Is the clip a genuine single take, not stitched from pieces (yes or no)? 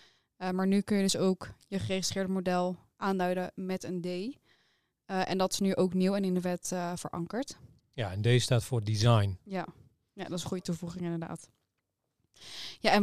yes